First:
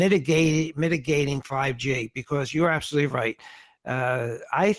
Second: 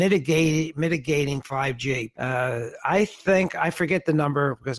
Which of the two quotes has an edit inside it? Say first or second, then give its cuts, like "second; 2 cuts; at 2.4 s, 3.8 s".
second; 1 cut; at 2.1 s